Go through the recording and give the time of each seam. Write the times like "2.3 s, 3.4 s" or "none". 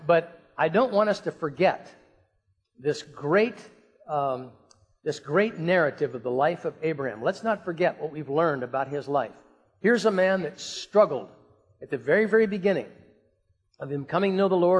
none